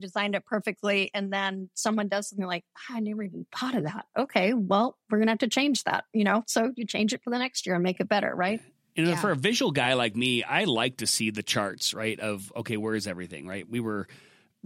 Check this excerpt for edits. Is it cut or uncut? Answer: uncut